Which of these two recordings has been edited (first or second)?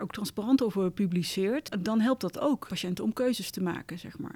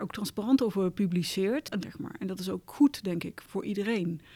second